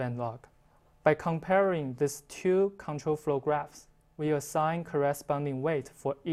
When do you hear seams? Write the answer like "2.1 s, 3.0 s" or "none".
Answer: 0.9 s